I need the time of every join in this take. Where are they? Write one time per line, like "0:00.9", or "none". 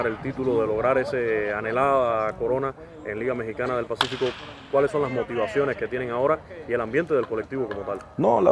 none